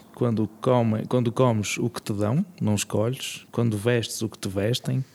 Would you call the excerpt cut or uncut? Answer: uncut